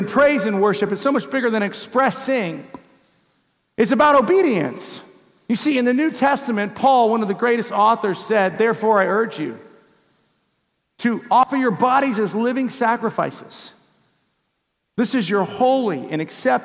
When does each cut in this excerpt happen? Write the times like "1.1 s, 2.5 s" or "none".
none